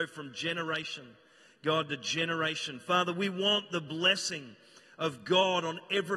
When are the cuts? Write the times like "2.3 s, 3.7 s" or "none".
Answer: none